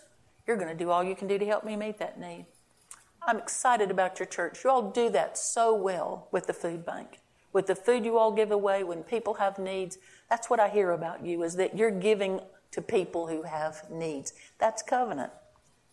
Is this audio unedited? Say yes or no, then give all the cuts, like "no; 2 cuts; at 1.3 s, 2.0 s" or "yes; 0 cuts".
yes; 0 cuts